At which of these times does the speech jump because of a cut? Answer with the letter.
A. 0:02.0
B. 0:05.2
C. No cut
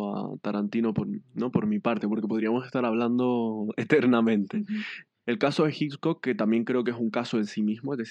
B